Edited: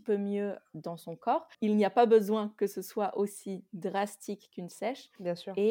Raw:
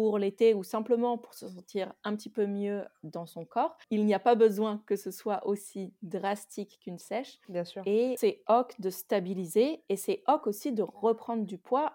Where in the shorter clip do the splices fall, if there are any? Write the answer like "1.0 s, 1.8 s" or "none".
none